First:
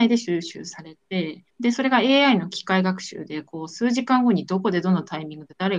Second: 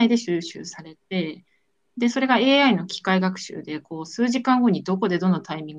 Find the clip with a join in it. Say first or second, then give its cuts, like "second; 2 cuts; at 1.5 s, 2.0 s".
first; 1 cut; at 1.5 s